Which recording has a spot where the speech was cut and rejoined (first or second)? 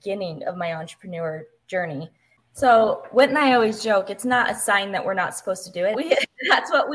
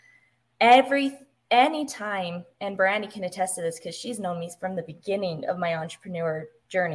first